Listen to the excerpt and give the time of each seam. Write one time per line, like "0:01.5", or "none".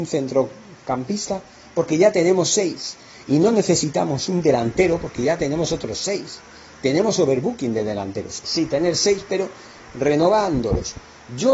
0:08.4